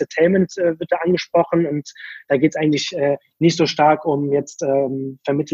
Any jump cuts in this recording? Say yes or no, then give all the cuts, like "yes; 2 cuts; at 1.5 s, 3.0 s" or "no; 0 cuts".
no; 0 cuts